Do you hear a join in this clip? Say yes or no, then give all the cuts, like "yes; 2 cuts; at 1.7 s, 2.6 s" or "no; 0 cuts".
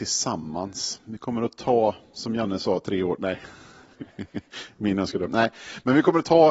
no; 0 cuts